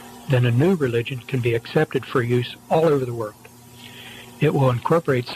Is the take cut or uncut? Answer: uncut